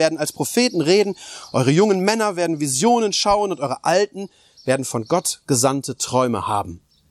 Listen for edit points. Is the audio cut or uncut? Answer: uncut